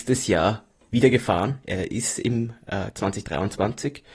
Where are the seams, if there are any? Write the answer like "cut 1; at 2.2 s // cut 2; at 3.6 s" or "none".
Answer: cut 1; at 2.9 s